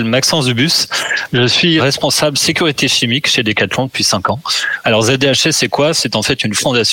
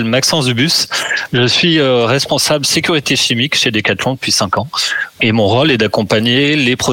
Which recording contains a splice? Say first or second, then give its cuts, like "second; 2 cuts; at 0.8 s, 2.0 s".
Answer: first; 2 cuts; at 1.8 s, 4.8 s